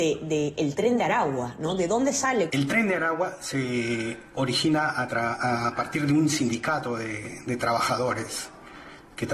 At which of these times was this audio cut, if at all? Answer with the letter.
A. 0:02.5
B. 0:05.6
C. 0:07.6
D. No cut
A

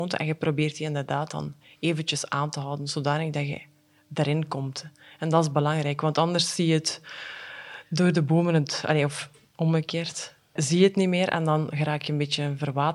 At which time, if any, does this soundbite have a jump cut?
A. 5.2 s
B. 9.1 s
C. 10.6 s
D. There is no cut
C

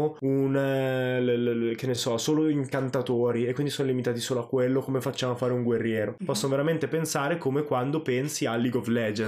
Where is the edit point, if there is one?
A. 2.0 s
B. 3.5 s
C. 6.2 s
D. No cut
D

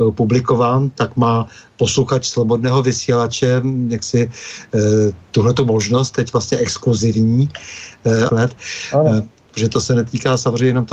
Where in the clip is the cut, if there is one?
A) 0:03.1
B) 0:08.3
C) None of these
B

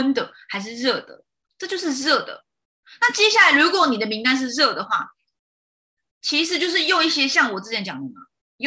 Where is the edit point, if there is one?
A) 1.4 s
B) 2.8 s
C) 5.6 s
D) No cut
A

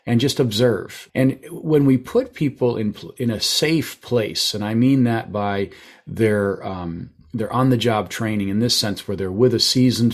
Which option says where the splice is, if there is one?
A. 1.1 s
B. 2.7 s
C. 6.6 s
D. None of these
A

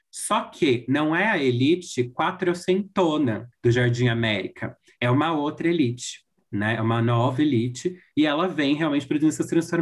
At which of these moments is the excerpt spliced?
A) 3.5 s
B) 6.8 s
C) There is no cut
A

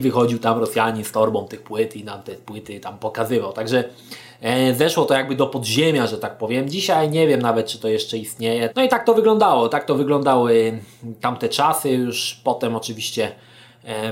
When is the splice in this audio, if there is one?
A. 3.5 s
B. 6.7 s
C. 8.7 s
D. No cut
C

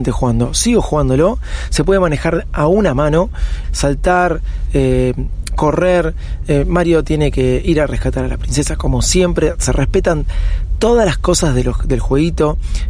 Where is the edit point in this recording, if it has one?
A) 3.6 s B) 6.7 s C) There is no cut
A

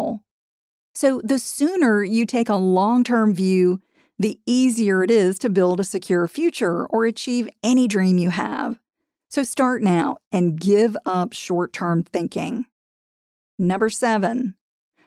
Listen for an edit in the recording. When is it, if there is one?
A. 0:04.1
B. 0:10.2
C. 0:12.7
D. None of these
B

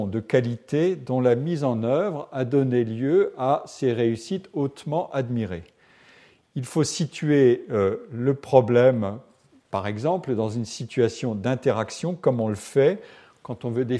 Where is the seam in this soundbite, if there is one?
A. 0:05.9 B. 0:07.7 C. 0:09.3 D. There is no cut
D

